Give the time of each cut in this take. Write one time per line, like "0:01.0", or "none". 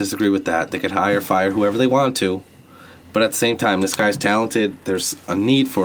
none